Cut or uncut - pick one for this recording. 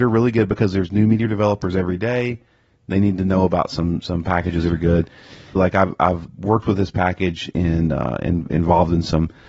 cut